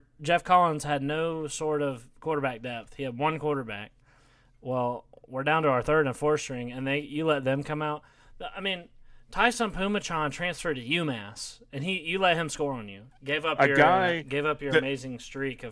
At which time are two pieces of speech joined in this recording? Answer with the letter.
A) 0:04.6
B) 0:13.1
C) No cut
B